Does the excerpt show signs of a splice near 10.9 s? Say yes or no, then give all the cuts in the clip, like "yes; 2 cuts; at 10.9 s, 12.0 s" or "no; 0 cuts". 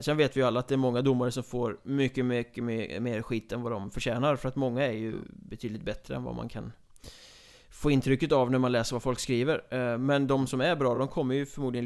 no; 0 cuts